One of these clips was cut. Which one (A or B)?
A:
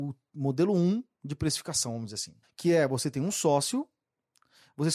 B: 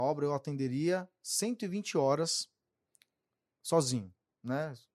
A